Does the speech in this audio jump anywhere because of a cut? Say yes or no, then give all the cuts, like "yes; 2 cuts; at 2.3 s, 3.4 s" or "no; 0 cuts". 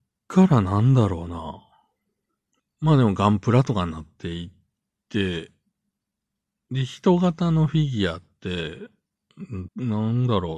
yes; 2 cuts; at 2.6 s, 9.7 s